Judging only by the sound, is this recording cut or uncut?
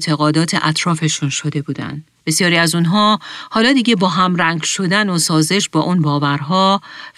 cut